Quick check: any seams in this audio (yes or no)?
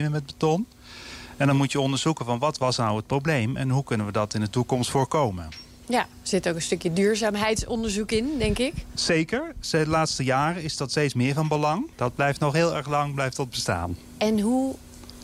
yes